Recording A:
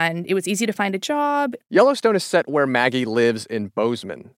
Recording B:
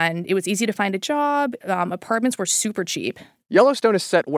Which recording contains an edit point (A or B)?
A